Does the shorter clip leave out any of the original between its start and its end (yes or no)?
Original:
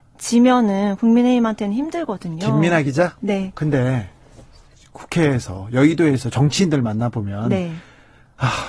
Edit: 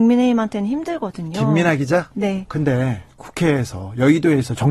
yes